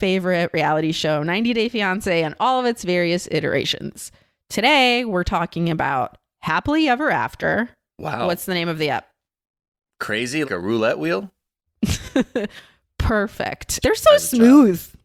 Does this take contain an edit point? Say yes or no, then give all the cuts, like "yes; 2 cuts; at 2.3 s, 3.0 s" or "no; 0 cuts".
yes; 2 cuts; at 10.4 s, 13.8 s